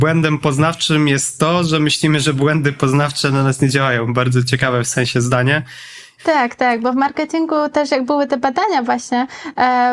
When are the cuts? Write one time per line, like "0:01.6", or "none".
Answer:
0:06.2